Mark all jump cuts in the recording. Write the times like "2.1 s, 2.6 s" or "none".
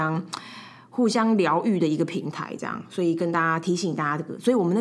none